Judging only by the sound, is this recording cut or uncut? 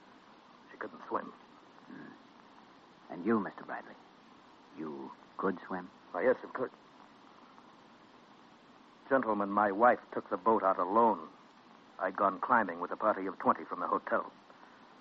uncut